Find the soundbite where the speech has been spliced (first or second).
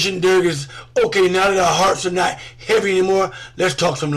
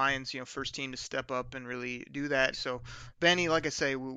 second